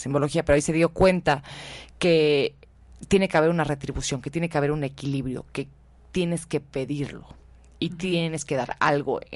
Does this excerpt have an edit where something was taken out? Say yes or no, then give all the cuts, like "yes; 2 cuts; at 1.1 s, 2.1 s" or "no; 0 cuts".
no; 0 cuts